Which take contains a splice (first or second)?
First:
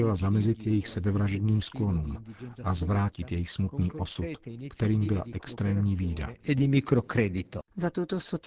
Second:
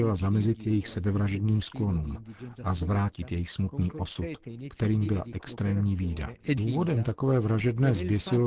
second